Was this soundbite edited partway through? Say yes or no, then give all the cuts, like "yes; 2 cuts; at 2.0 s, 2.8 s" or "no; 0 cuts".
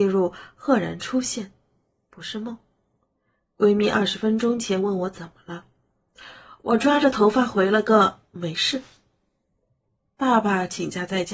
no; 0 cuts